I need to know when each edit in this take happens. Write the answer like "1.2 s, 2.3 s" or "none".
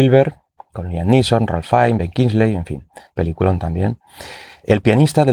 none